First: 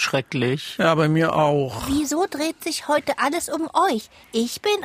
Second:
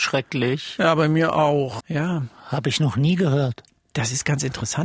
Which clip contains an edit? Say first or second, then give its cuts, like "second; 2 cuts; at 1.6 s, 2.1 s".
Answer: second; 1 cut; at 1.8 s